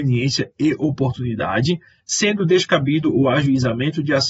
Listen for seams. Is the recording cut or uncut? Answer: cut